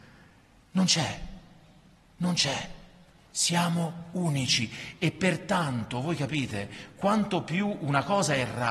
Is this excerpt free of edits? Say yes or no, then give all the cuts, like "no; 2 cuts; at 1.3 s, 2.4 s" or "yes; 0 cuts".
yes; 0 cuts